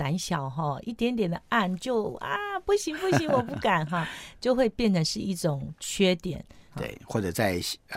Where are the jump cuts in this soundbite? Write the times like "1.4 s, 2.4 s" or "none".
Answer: 6.7 s

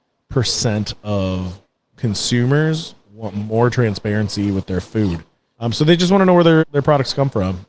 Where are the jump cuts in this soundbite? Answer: 5.5 s, 6.6 s

